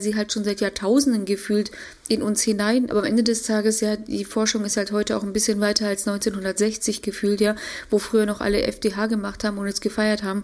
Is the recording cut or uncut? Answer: cut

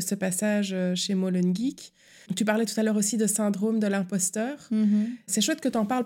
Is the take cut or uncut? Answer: uncut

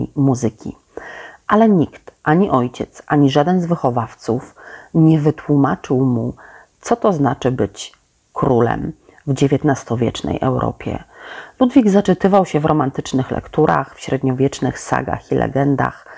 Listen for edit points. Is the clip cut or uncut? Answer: uncut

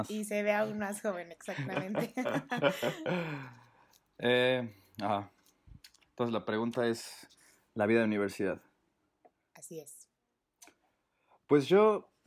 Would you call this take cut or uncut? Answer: uncut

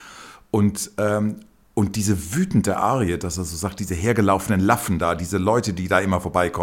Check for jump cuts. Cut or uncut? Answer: uncut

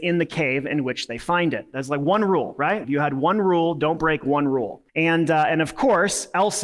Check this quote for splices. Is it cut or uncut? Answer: cut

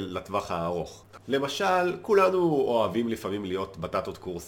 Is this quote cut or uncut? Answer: cut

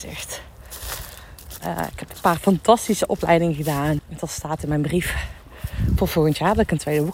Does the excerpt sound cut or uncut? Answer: cut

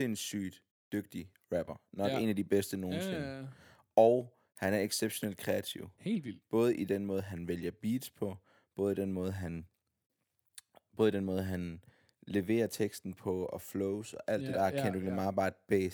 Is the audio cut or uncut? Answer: cut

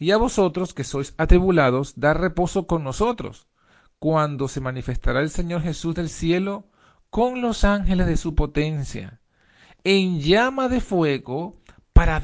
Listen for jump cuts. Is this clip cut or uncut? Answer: uncut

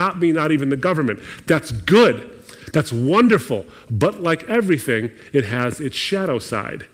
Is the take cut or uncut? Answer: uncut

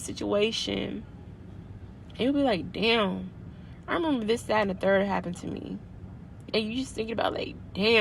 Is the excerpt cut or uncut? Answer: cut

